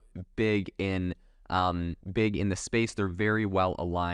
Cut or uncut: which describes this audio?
cut